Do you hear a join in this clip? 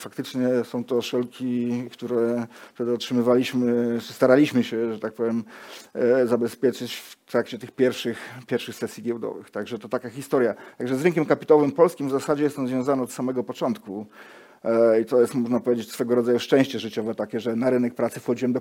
no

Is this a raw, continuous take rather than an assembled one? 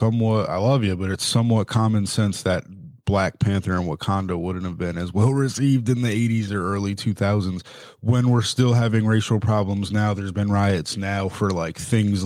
no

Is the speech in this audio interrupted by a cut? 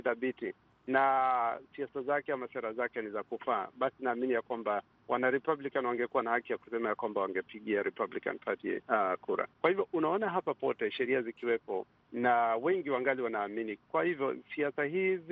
yes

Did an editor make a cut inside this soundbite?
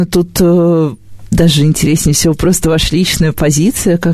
no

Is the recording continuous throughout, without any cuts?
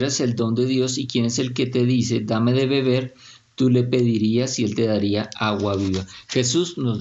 yes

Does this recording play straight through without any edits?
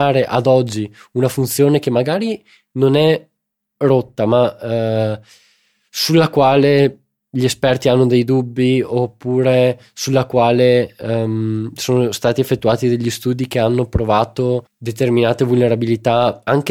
no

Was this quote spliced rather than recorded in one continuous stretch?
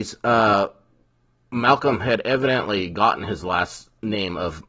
no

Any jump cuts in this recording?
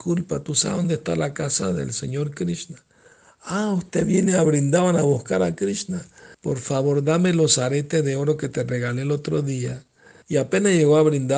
yes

